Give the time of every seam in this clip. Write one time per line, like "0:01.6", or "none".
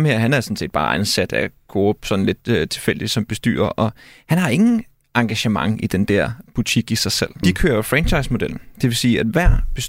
0:07.4